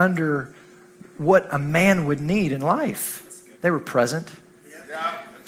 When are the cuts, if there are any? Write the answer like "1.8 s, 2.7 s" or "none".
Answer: 3.5 s